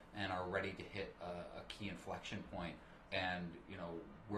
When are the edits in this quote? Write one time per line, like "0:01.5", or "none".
0:03.1